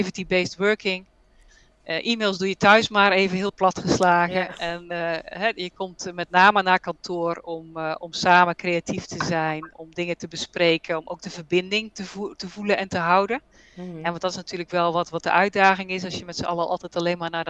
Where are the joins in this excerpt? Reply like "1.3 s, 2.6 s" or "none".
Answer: 9.7 s